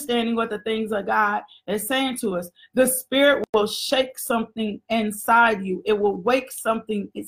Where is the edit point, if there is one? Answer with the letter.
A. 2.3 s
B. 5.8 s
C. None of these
C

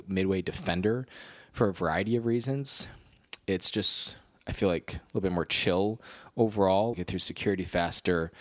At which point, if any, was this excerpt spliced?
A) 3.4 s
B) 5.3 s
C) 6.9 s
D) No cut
C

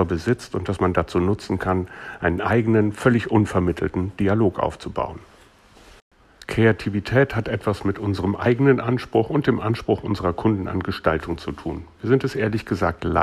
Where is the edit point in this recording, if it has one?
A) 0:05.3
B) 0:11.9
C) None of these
C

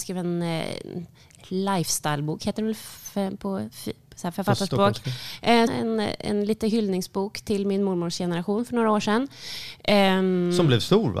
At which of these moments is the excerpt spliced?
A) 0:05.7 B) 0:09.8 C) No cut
A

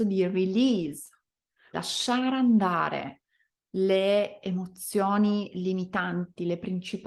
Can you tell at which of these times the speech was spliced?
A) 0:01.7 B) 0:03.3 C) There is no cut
A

